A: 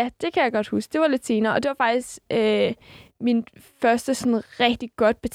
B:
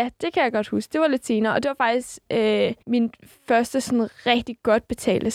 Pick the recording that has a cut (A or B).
B